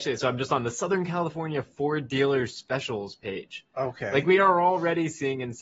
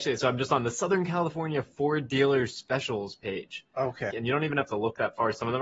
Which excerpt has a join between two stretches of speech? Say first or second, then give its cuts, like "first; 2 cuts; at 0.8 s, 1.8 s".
second; 1 cut; at 4.1 s